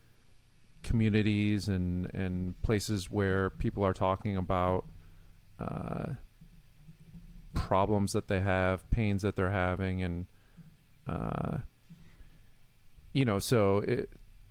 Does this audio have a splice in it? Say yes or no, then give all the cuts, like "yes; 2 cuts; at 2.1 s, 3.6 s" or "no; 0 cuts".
no; 0 cuts